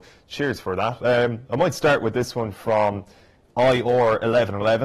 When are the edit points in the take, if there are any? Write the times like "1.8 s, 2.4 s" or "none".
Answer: none